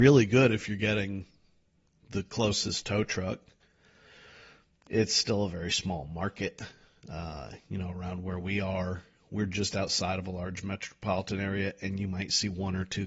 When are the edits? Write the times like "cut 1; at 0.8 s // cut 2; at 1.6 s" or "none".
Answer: none